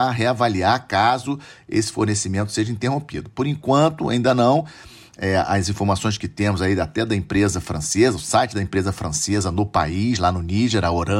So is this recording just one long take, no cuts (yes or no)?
yes